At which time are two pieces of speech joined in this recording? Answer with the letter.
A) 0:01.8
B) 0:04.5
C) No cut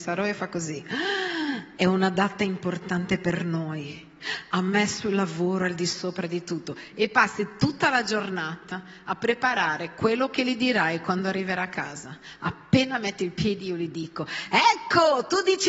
A